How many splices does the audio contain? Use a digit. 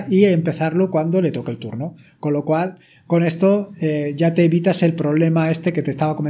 0